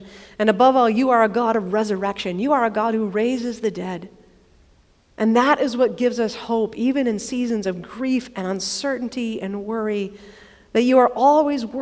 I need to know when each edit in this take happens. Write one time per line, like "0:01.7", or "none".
none